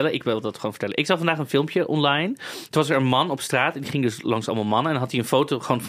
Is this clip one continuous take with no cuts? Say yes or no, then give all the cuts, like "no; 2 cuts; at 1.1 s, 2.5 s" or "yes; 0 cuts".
yes; 0 cuts